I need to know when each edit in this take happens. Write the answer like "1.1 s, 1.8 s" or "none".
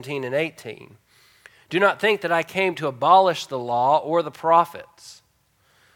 none